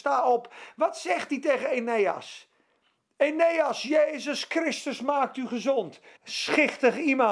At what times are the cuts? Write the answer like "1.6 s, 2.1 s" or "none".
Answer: 6.2 s